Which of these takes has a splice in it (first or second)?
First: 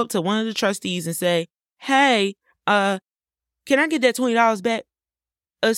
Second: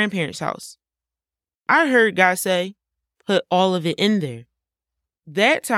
second